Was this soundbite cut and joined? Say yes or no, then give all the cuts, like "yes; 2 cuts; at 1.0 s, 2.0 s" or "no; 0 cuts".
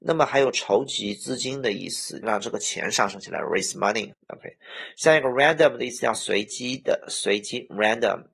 yes; 2 cuts; at 2.2 s, 4.1 s